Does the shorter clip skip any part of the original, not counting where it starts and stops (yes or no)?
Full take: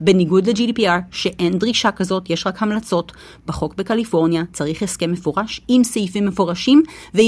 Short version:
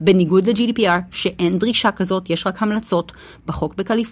no